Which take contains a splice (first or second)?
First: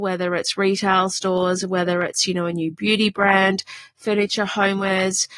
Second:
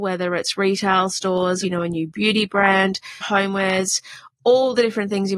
second